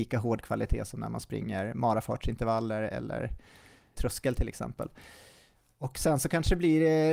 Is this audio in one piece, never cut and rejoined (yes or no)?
no